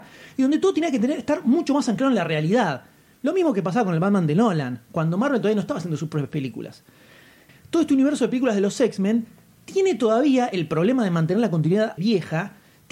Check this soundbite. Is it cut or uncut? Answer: cut